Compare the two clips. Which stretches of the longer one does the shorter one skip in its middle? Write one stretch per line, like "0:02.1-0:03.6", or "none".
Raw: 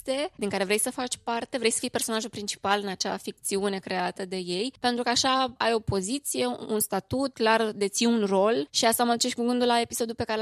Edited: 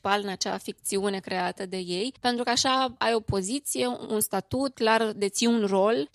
none